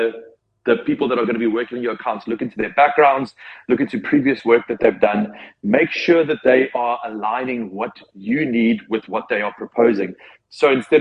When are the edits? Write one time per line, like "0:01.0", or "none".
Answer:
none